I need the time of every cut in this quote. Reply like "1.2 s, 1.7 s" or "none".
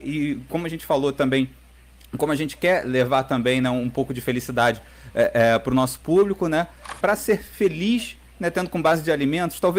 7.0 s